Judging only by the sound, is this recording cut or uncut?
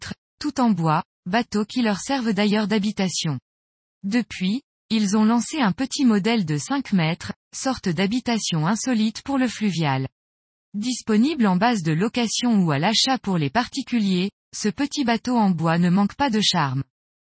uncut